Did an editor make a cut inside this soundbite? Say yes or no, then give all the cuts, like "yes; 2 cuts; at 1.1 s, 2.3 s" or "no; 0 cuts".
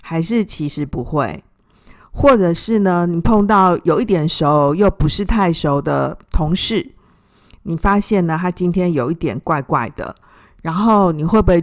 no; 0 cuts